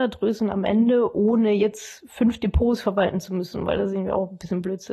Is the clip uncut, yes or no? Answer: yes